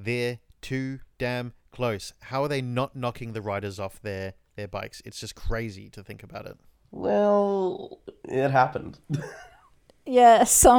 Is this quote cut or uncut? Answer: uncut